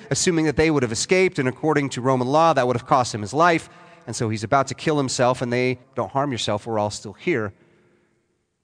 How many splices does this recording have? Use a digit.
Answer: 1